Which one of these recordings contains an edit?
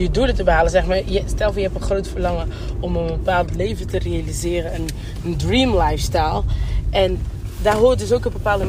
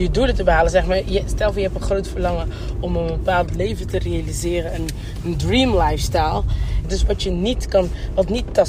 second; 1 cut; at 6.8 s

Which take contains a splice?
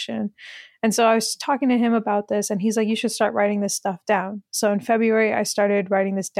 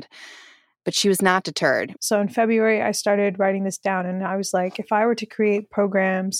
second; 1 cut; at 2.0 s

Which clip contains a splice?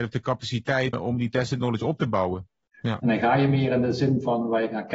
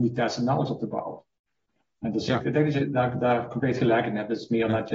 first; 2 cuts; at 0.9 s, 2.7 s

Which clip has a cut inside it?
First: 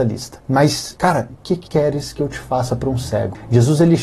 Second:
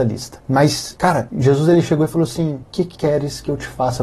first; 1 cut; at 1.3 s

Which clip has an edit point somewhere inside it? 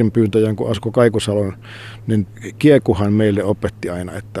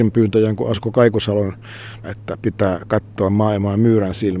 second; 1 cut; at 2.0 s

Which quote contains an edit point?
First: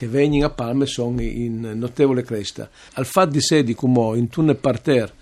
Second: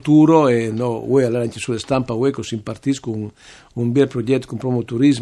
first; 1 cut; at 2.9 s

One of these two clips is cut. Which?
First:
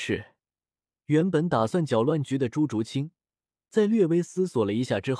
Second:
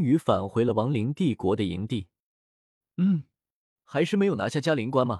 second; 1 cut; at 3.8 s

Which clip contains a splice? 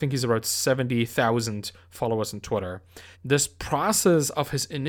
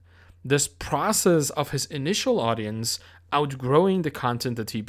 first; 1 cut; at 3.1 s

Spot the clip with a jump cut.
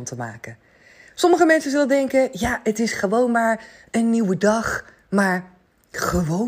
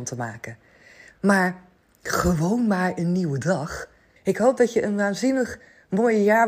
second; 2 cuts; at 1.1 s, 4.2 s

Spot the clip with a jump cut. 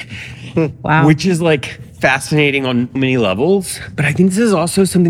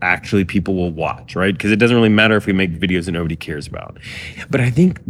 first; 1 cut; at 3.0 s

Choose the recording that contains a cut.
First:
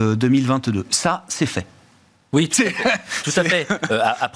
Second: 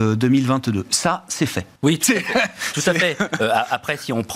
second; 1 cut; at 1.8 s

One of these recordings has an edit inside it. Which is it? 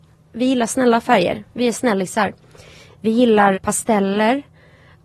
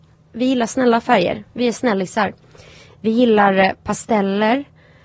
first; 1 cut; at 3.5 s

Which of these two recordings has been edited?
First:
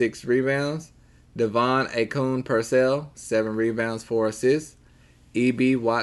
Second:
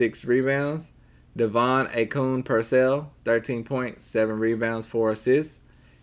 first; 1 cut; at 3.1 s

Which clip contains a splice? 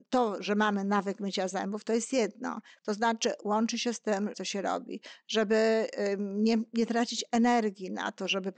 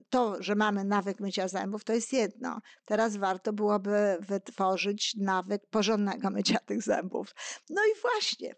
first; 2 cuts; at 2.8 s, 4.3 s

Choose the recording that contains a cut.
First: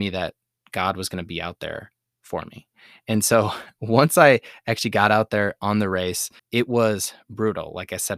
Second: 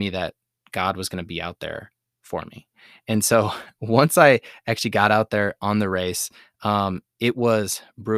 first; 1 cut; at 6.4 s

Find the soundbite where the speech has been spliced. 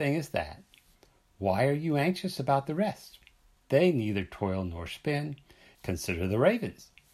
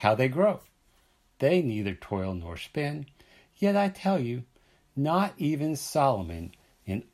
first; 2 cuts; at 3.6 s, 5.7 s

